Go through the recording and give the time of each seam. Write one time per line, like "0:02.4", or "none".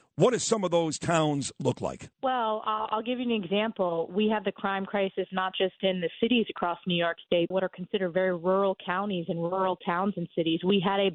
0:02.1
0:07.5